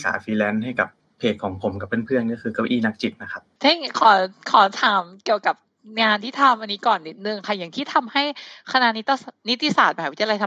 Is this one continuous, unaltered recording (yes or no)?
yes